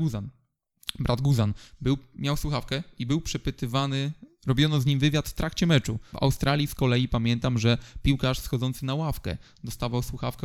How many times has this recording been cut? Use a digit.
1